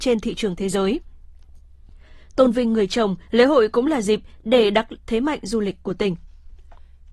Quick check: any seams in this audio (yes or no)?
yes